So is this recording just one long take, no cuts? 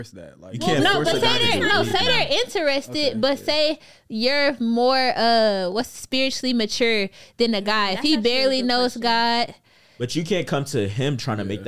yes; 0 cuts

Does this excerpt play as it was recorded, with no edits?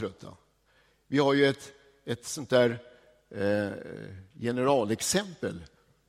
yes; 0 cuts

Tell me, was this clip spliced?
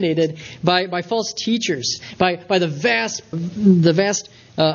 yes; 1 cut; at 3.3 s

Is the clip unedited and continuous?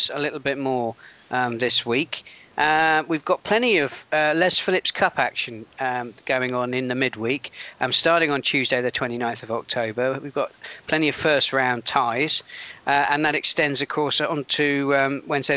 yes; 0 cuts

